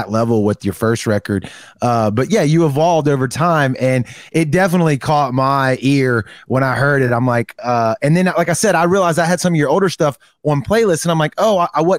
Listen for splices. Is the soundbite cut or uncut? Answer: uncut